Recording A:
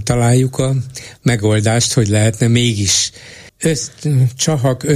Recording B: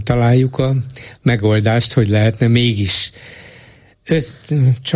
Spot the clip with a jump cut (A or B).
A